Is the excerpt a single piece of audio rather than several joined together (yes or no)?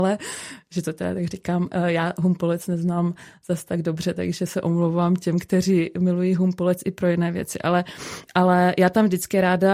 yes